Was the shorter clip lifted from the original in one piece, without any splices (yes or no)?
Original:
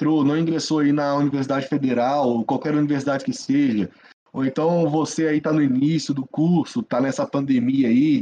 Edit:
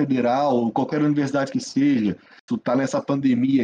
no